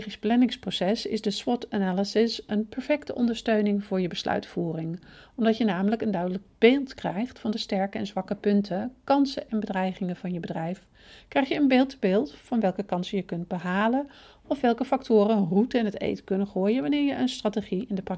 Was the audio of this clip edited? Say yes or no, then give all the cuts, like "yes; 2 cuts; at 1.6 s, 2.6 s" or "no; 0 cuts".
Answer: no; 0 cuts